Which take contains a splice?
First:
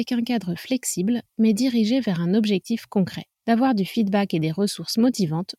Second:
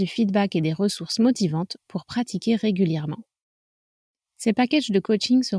first; 1 cut; at 3.3 s

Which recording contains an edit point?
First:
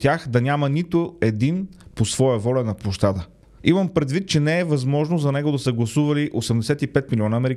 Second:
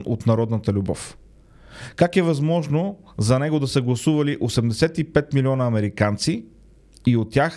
first; 1 cut; at 3.6 s

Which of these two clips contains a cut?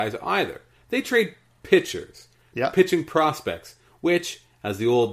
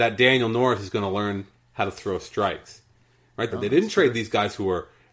second; 1 cut; at 3.5 s

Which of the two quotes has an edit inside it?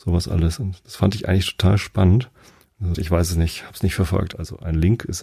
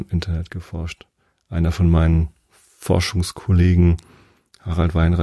first; 2 cuts; at 2.9 s, 4.3 s

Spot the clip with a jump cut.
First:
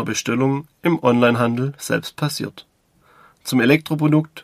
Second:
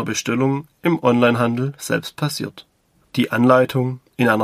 second; 1 cut; at 3.0 s

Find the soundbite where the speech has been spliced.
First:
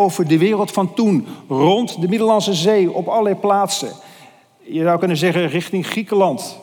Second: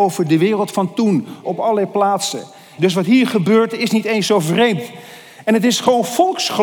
second; 2 cuts; at 1.4 s, 2.8 s

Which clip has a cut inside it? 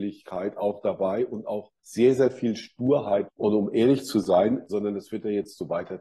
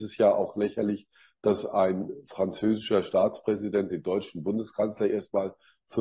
first; 3 cuts; at 1.8 s, 3.3 s, 4.7 s

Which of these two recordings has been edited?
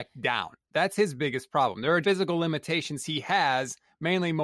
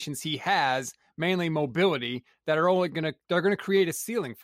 first; 1 cut; at 2.0 s

